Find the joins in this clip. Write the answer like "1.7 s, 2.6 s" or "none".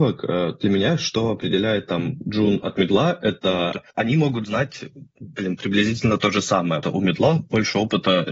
3.9 s, 6.8 s